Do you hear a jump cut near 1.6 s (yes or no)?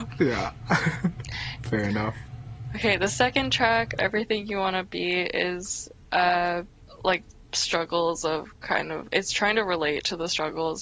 yes